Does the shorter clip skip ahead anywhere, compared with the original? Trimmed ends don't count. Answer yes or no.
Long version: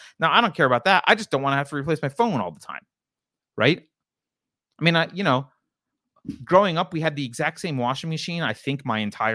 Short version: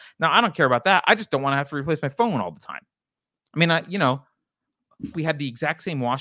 yes